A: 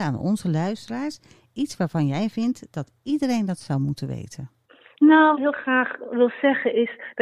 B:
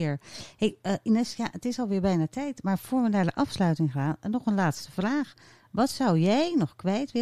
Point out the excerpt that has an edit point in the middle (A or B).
A